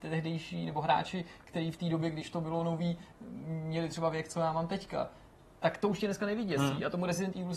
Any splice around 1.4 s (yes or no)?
no